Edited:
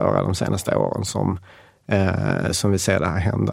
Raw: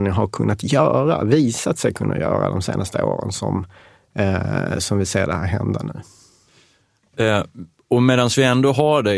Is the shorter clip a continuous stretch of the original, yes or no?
yes